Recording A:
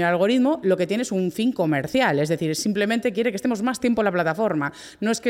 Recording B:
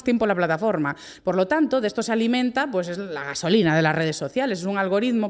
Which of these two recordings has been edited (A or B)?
B